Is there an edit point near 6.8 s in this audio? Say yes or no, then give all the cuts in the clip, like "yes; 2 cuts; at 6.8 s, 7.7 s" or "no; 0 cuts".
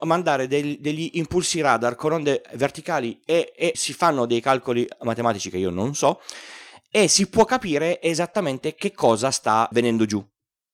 no; 2 cuts; at 3.7 s, 9.7 s